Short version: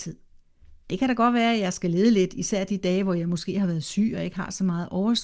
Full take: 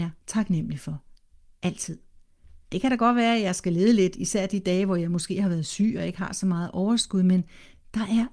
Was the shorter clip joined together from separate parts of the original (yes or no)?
no